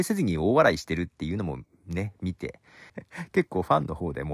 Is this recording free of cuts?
no; 1 cut; at 2.9 s

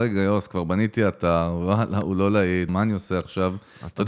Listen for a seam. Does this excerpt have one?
yes; 1 cut; at 2.7 s

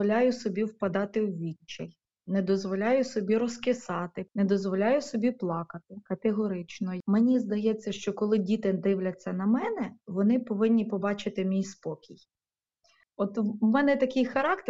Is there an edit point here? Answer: yes; 2 cuts; at 4.3 s, 13.0 s

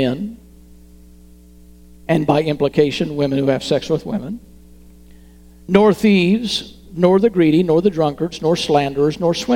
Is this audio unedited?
yes; 0 cuts

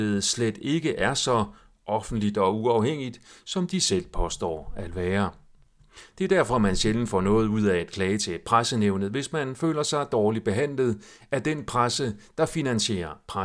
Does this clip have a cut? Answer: no; 0 cuts

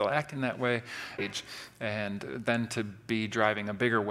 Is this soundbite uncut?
no; 1 cut; at 1.2 s

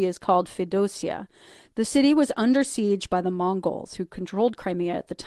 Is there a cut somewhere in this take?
no; 0 cuts

